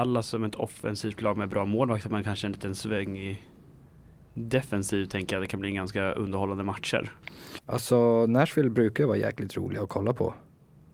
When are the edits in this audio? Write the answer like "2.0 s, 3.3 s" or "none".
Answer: 7.6 s